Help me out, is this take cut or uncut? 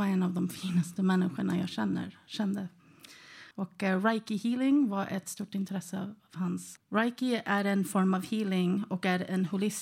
cut